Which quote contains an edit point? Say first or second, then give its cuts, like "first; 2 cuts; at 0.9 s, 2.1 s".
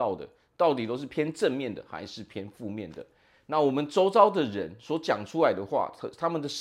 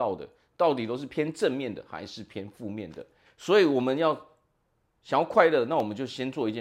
second; 1 cut; at 3.3 s